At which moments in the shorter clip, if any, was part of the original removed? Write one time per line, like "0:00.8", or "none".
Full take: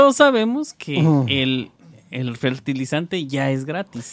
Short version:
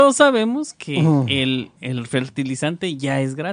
0:01.8